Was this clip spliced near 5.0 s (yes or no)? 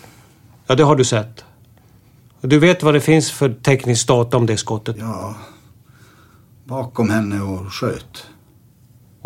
yes